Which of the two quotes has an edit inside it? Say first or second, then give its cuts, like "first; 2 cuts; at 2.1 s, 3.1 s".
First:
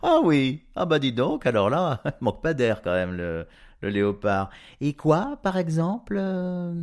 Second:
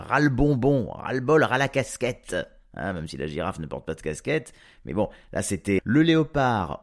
second; 1 cut; at 5.8 s